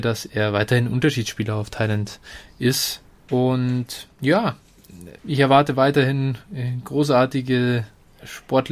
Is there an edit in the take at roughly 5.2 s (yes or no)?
yes